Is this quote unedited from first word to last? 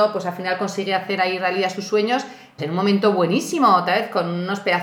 no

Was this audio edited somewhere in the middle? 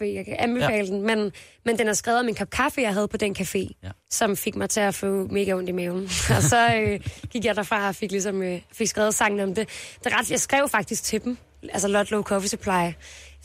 no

